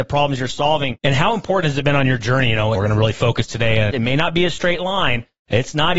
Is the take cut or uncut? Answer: cut